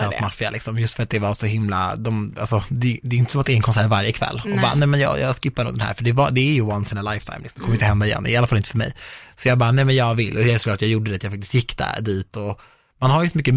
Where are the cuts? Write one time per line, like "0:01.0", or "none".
none